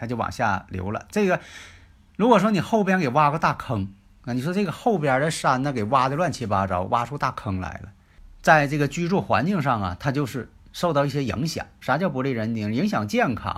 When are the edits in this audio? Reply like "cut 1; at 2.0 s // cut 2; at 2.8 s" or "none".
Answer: cut 1; at 11.8 s